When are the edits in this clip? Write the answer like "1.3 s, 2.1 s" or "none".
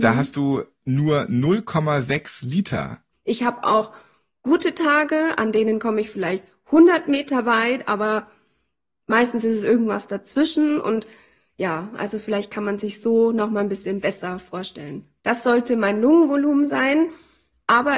3.1 s, 15.2 s